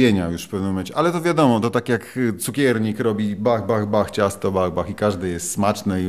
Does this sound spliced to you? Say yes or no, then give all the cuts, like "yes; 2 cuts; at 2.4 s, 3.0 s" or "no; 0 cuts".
no; 0 cuts